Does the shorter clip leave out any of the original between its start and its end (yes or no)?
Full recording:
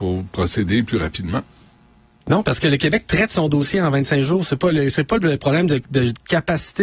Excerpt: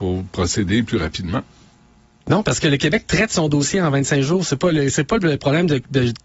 no